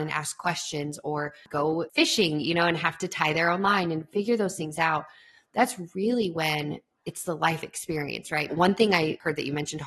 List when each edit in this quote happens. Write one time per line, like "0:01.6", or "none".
0:08.5